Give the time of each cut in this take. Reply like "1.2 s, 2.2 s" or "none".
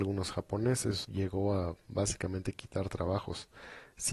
1.0 s